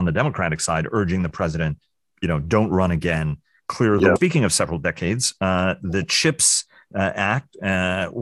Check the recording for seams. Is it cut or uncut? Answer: cut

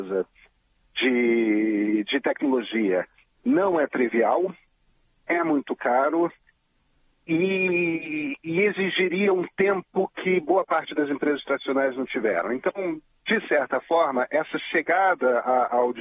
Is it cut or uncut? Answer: uncut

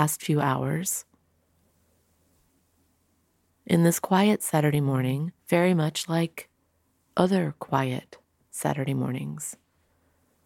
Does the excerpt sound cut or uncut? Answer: cut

